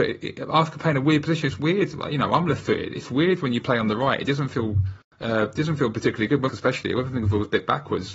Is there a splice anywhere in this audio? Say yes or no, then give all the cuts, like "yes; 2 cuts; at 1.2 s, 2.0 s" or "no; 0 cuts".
yes; 1 cut; at 6.5 s